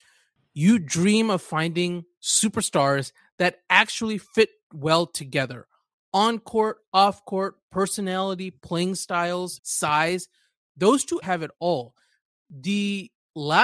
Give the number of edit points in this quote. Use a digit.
2